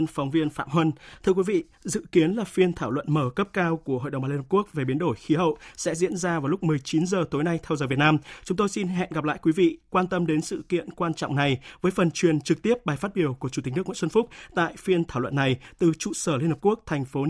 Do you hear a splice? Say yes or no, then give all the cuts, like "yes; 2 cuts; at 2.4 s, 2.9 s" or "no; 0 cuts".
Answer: no; 0 cuts